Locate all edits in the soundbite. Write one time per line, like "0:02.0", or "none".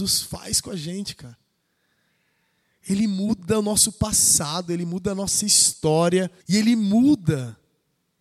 0:06.4